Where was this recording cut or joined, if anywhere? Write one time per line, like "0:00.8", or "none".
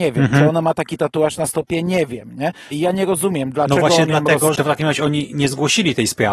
0:02.7
0:04.5